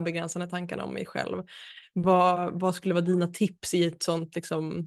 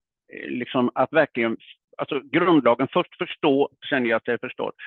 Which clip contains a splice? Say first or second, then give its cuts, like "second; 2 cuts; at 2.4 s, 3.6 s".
second; 1 cut; at 3.8 s